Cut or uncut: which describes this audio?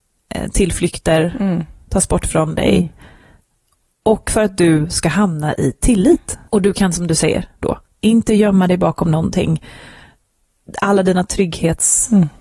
cut